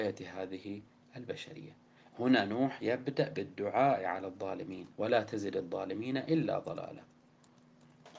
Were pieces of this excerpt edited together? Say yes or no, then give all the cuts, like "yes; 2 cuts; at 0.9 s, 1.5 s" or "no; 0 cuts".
yes; 2 cuts; at 2.1 s, 4.9 s